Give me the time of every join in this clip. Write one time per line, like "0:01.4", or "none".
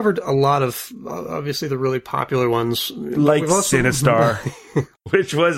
none